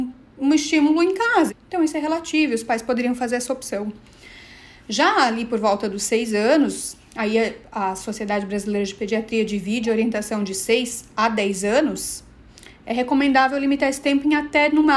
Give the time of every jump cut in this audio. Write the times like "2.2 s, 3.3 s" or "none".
1.5 s